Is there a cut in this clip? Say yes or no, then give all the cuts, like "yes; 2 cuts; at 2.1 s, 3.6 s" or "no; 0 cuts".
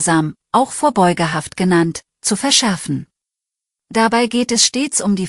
yes; 1 cut; at 3.8 s